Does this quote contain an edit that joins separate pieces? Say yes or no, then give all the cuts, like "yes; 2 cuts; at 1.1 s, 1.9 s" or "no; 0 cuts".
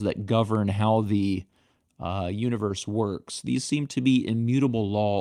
no; 0 cuts